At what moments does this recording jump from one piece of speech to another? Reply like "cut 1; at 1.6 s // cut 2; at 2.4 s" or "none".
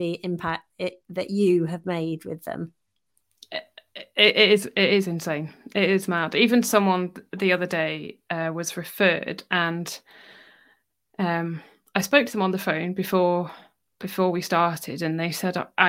none